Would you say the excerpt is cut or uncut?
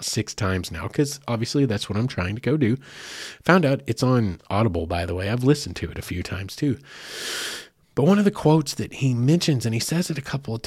uncut